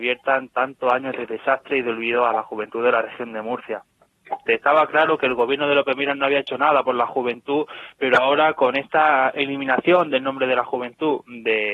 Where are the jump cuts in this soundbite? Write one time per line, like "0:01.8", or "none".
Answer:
0:04.5